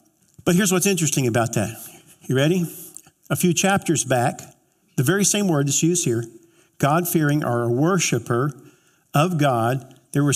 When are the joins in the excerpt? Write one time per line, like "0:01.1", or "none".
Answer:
0:04.8